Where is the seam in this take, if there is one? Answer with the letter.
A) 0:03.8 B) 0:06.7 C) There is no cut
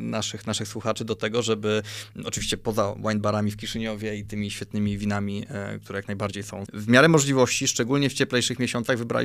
B